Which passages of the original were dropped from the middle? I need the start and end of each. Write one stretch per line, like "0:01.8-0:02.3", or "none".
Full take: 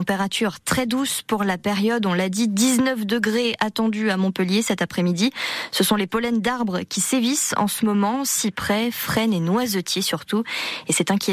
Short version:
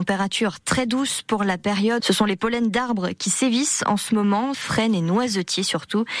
0:02.0-0:05.7
0:08.2-0:08.9